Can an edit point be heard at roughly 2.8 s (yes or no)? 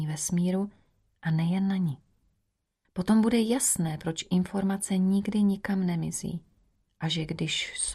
yes